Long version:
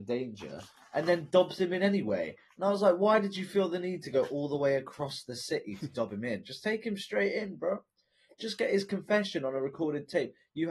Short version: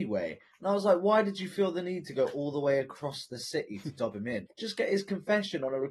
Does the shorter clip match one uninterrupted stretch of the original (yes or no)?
no